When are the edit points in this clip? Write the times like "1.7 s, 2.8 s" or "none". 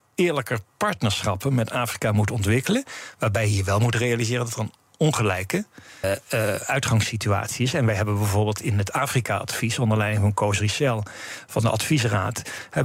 6.0 s